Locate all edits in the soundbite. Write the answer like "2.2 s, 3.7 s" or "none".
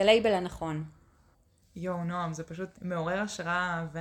2.7 s